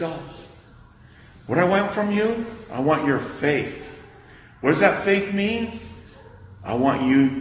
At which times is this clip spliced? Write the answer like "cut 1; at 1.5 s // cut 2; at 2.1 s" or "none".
none